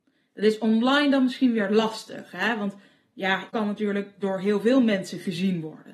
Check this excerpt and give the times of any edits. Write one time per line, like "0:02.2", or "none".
0:03.5